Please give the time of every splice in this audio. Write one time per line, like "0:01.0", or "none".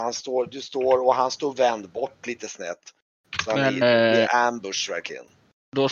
0:03.8